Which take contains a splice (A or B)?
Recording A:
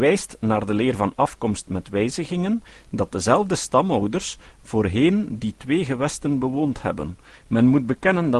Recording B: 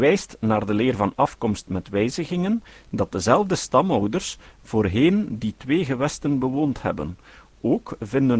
A